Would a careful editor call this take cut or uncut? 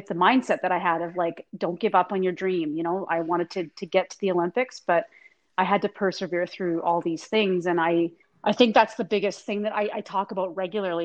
uncut